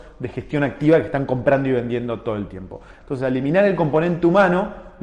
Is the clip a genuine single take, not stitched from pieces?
no; 1 cut; at 3.0 s

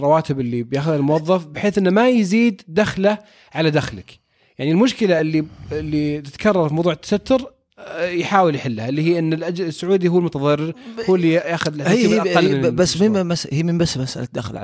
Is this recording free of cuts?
yes; 0 cuts

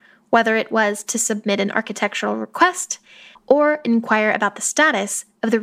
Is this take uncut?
no; 1 cut; at 3.3 s

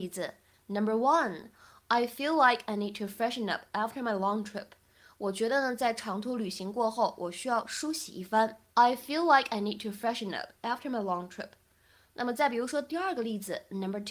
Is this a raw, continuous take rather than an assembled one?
yes; 0 cuts

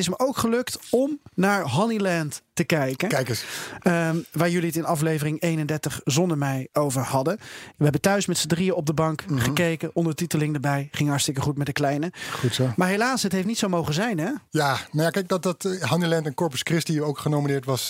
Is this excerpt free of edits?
yes; 0 cuts

